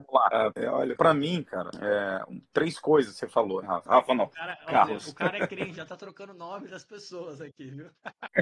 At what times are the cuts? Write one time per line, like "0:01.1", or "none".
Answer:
0:03.6